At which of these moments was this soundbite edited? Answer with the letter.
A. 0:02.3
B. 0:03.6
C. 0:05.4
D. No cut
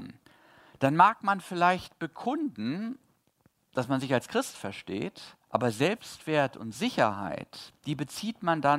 C